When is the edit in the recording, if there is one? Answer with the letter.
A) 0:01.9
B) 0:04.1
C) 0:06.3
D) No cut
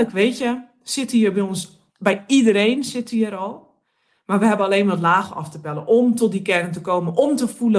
A